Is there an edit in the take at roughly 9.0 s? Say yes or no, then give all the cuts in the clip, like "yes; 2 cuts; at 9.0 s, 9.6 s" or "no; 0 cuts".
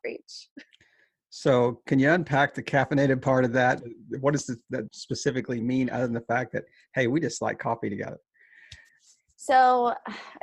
no; 2 cuts; at 3.8 s, 4.9 s